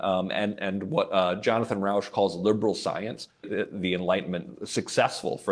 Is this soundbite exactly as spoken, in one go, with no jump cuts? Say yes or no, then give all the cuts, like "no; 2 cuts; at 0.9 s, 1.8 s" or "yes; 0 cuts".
no; 1 cut; at 3.4 s